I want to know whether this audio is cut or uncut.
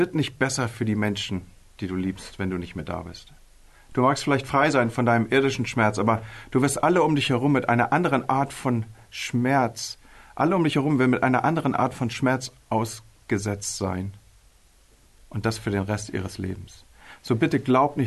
uncut